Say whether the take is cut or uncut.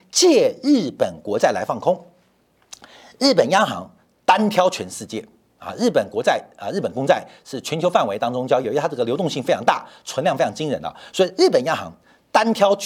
uncut